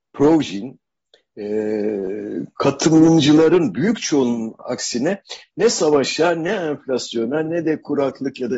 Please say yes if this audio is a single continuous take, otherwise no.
yes